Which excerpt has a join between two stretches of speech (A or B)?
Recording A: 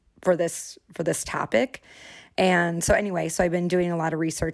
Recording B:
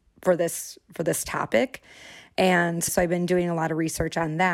B